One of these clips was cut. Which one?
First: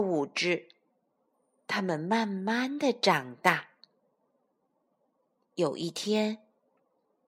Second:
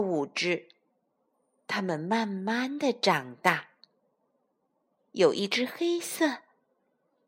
second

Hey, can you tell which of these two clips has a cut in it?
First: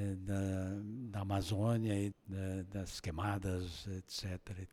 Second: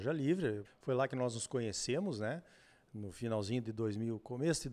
first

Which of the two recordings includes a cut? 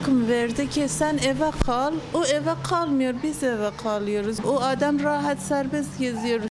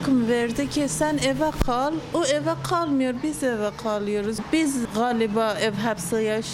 first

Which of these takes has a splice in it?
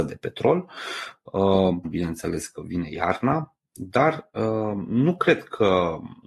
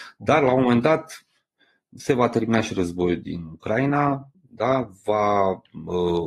first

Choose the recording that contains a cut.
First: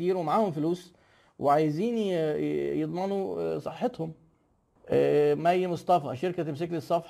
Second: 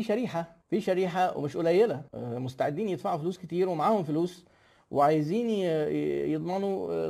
second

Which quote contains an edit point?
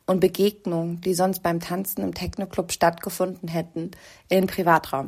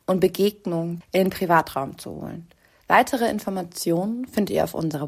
second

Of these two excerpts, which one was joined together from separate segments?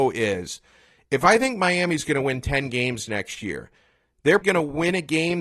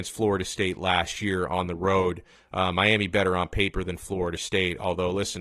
first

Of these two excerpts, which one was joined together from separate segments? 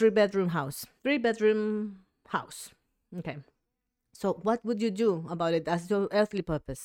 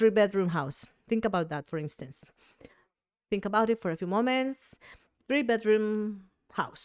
first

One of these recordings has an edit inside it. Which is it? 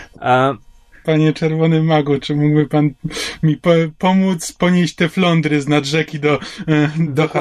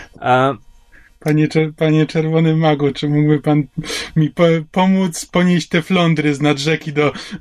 first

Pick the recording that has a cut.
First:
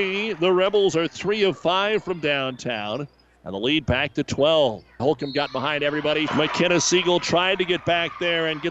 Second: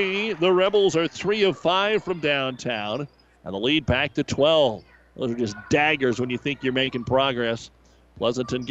first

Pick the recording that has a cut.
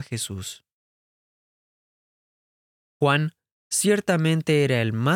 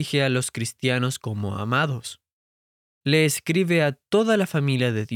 first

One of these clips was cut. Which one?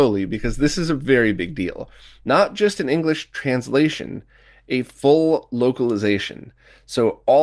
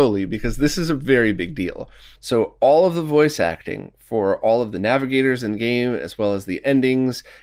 second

